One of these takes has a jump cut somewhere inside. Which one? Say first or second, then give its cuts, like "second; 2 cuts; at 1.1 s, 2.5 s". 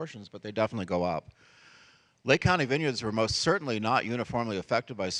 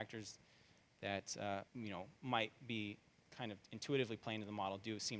second; 1 cut; at 1.7 s